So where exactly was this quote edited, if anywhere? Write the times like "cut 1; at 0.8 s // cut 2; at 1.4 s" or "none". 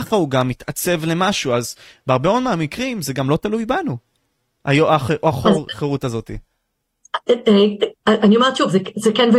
none

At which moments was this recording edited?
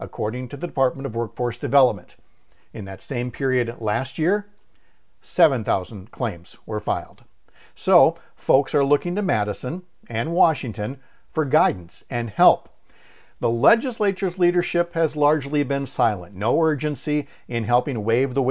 none

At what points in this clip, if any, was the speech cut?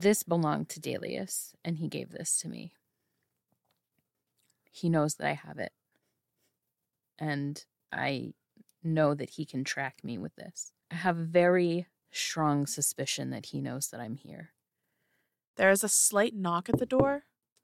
cut 1; at 10.8 s // cut 2; at 15.5 s

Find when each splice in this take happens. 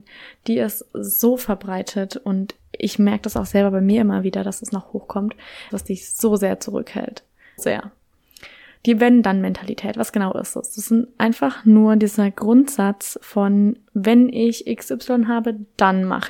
cut 1; at 5.7 s // cut 2; at 7.6 s

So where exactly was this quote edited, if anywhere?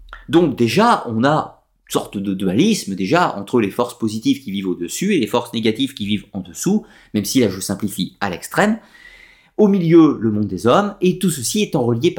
none

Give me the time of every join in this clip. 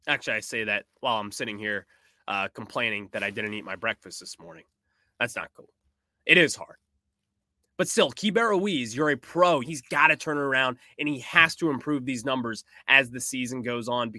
cut 1; at 9.6 s

